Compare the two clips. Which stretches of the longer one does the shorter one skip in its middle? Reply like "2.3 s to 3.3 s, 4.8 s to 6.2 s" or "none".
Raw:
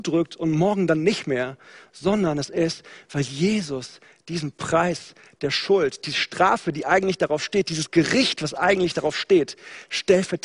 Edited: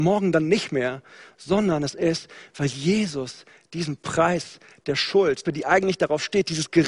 6.0 s to 6.6 s